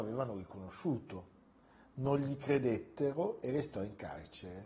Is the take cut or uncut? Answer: uncut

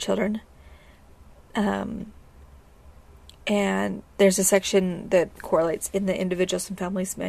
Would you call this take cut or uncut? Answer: uncut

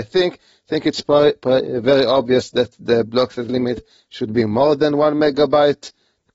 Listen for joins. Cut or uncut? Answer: uncut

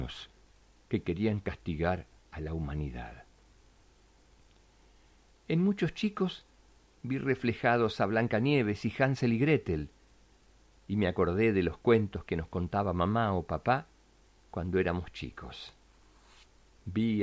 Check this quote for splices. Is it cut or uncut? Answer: uncut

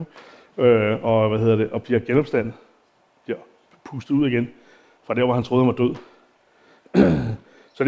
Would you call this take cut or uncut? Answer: uncut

